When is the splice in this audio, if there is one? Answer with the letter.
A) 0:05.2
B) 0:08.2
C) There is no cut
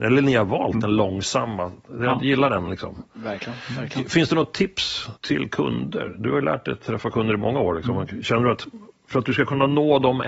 A